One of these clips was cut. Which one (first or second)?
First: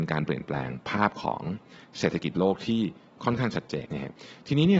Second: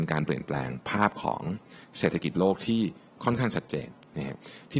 first